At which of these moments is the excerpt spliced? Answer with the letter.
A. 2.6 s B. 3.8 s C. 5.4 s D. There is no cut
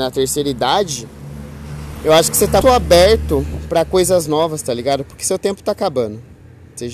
A